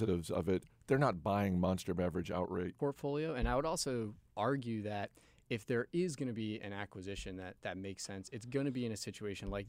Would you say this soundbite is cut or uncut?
cut